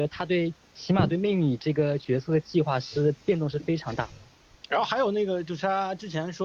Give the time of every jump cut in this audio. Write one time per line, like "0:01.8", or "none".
0:04.6